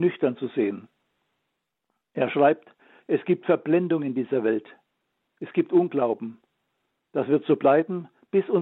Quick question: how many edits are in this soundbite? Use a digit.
0